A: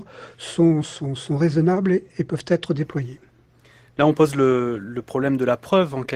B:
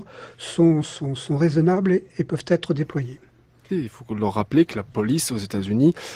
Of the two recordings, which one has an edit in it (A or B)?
B